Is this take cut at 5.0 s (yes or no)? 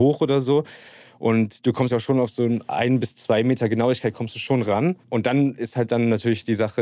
yes